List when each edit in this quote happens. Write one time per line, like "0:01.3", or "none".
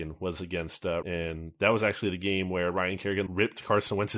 0:01.0
0:03.3